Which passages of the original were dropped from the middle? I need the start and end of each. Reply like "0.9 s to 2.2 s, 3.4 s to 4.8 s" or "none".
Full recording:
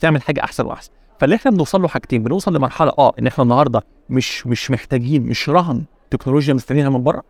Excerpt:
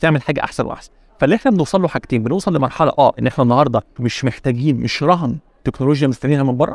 4.0 s to 4.4 s